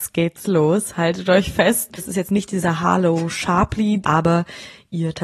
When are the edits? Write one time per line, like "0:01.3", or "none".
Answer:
0:02.0
0:04.0